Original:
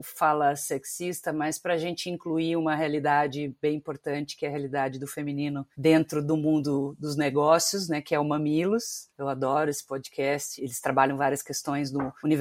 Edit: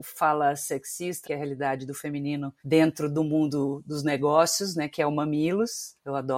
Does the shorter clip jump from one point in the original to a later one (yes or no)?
yes